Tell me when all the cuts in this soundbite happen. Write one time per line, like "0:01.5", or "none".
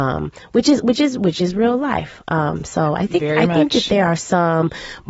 none

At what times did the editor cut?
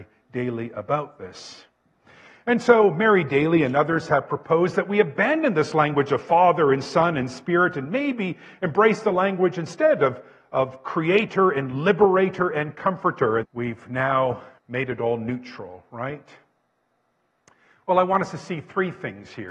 0:13.4
0:14.6

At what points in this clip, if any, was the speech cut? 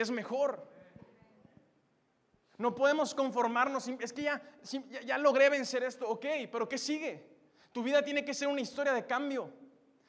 none

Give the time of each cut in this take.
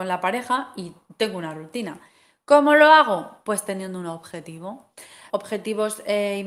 0:05.3

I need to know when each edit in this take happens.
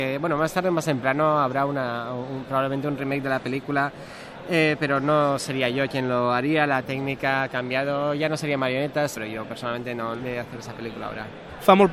0:09.1
0:10.2

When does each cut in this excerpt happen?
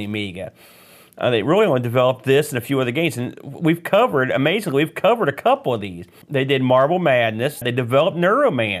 0:06.2
0:07.6

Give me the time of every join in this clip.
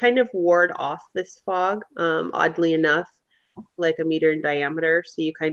0:01.9
0:03.8

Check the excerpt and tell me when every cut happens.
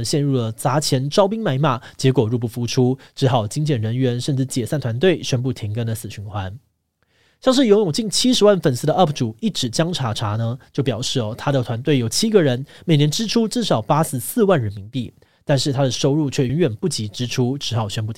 0:16.5

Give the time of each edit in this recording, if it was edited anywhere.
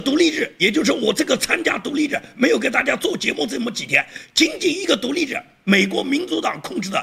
none

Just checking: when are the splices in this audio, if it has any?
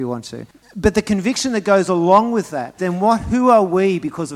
0:02.8

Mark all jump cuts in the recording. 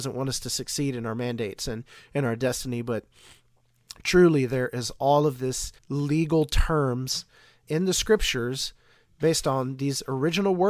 0:05.8
0:07.6

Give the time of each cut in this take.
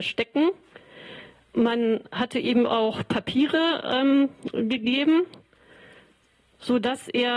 none

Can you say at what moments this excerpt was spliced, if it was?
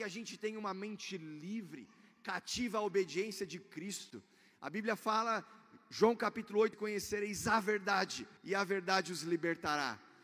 0:06.7
0:08.4

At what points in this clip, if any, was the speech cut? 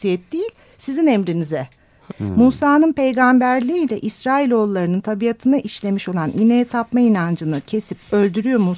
0:02.1

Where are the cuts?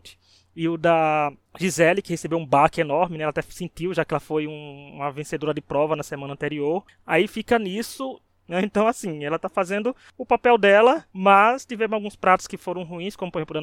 0:08.3
0:11.1

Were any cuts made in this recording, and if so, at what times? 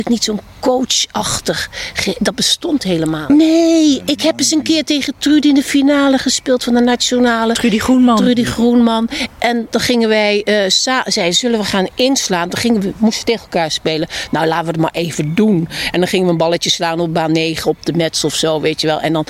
0:03.3

